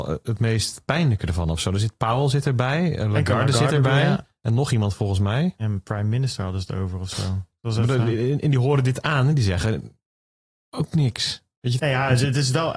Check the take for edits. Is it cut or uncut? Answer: cut